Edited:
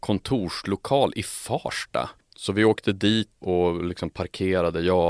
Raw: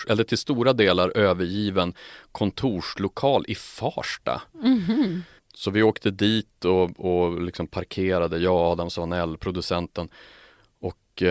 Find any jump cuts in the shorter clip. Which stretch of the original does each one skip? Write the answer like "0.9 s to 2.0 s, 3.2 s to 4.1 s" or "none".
4.5 s to 5.4 s, 6.6 s to 7.0 s